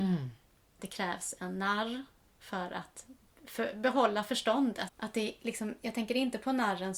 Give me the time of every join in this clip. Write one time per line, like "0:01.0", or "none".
0:04.9